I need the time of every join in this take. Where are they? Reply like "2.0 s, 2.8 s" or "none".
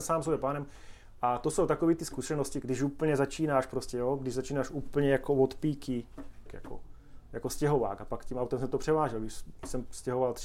2.6 s, 6.5 s